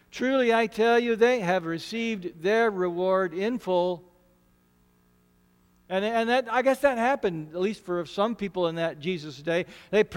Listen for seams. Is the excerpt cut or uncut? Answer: uncut